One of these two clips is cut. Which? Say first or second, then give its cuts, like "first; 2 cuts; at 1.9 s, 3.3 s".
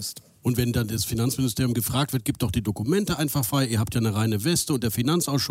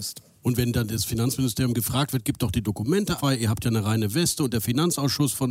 second; 1 cut; at 3.2 s